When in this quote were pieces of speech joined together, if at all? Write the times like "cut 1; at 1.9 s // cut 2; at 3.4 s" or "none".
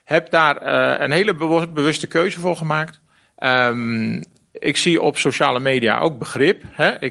none